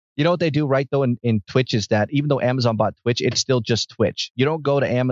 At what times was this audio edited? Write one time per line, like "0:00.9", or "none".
none